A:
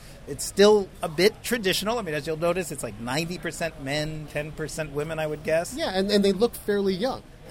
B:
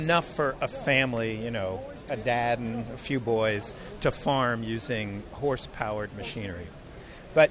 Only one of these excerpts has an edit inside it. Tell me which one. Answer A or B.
A